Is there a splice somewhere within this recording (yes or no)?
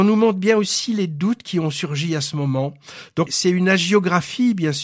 yes